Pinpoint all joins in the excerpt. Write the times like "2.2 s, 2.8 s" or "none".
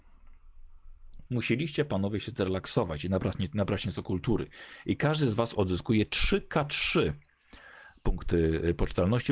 1.3 s